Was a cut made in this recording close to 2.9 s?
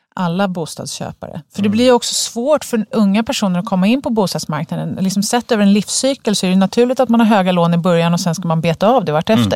yes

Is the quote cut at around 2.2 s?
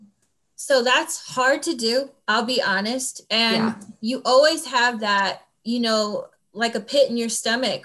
no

